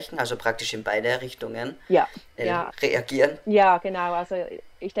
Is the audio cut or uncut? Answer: cut